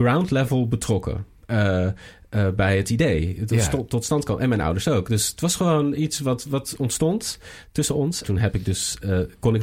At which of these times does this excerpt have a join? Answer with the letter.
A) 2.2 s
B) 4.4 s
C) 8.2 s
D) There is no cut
C